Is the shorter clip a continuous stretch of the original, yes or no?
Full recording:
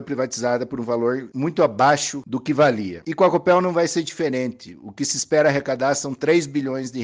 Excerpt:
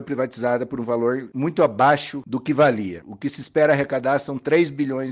no